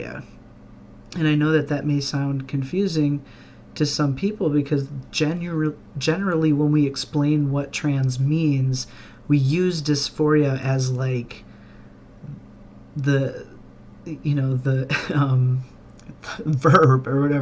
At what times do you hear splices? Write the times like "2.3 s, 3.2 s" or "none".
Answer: none